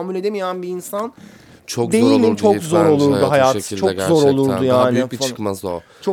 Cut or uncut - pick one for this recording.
uncut